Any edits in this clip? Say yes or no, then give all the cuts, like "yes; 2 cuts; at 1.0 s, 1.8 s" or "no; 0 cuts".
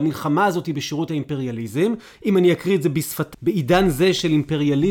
yes; 1 cut; at 3.3 s